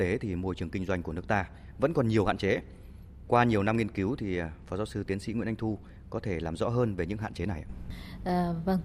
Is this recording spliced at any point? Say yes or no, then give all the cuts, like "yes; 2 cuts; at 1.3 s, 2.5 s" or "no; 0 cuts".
no; 0 cuts